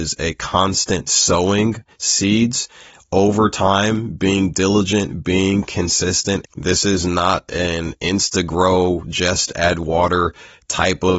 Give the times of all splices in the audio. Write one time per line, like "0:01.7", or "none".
0:06.4